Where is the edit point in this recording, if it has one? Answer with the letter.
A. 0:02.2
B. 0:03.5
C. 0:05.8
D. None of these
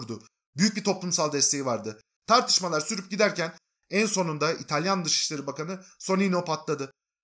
A